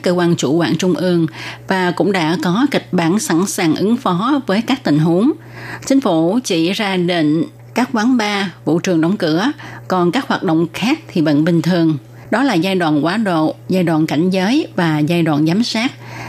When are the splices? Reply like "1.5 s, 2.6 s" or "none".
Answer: 5.8 s, 12.3 s